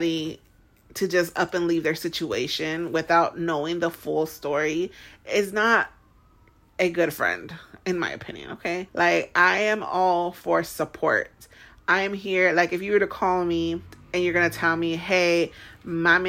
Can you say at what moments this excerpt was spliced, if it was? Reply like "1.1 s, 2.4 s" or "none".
8.9 s